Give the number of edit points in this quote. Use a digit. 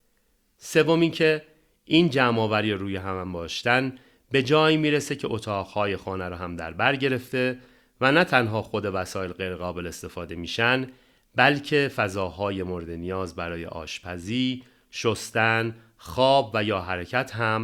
0